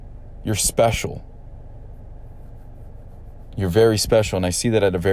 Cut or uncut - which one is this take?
uncut